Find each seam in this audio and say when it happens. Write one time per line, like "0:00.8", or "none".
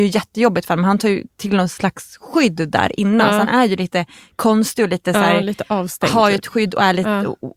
none